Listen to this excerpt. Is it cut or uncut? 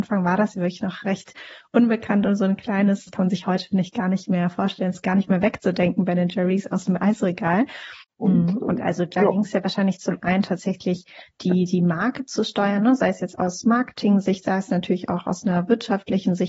cut